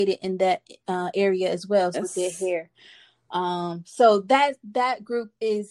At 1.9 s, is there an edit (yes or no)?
yes